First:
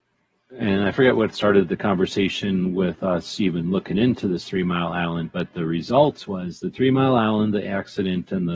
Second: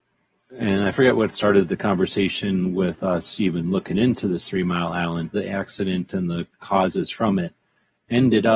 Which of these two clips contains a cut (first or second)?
second